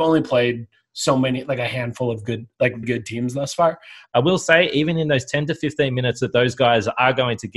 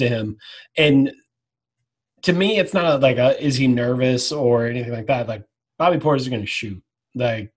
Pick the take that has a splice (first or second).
first